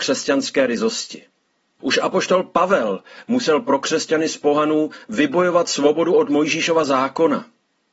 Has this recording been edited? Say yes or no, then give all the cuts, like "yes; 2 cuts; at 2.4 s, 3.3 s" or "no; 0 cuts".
yes; 1 cut; at 1.8 s